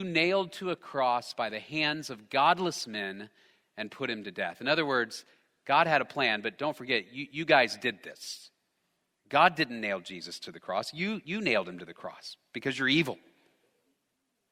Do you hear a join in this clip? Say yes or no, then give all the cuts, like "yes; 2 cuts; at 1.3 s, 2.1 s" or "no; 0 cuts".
no; 0 cuts